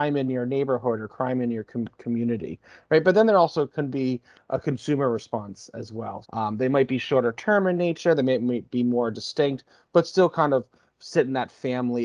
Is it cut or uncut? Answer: cut